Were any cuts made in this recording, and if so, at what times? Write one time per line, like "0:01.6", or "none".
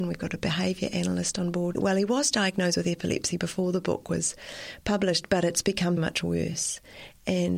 0:01.7
0:06.0